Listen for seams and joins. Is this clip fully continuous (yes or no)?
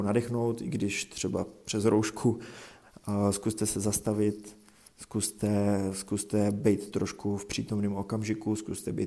yes